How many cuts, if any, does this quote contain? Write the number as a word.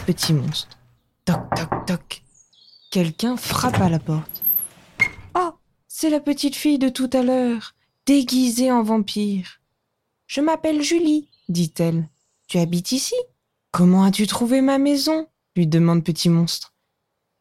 zero